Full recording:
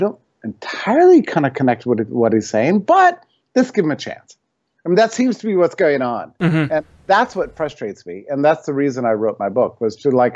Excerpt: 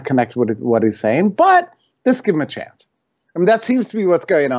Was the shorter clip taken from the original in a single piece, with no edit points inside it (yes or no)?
yes